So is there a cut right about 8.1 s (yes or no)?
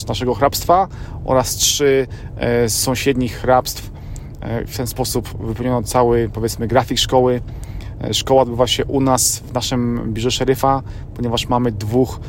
no